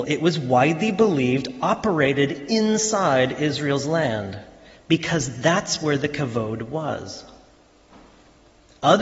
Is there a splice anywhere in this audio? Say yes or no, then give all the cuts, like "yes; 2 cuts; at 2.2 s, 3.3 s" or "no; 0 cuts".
no; 0 cuts